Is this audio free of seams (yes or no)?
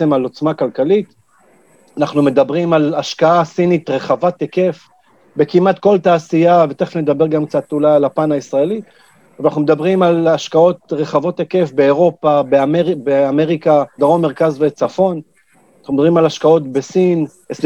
no